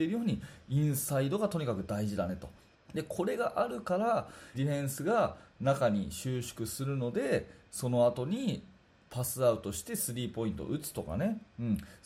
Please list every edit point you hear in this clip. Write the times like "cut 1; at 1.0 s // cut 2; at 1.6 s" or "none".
cut 1; at 2.7 s // cut 2; at 4.5 s